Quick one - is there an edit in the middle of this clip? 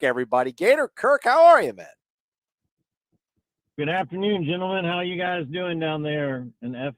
no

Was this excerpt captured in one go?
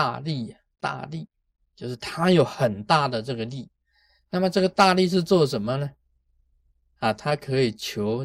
yes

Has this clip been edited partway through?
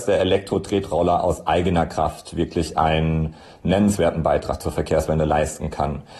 no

